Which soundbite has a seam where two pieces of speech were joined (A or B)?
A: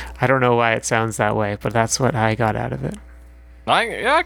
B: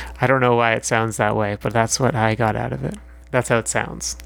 B